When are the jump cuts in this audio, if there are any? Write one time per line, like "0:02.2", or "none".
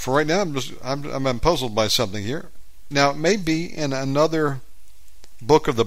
0:02.9